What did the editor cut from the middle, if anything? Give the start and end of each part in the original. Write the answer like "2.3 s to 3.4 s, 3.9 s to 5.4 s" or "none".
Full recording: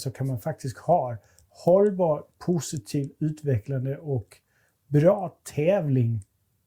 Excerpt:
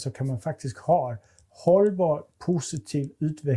none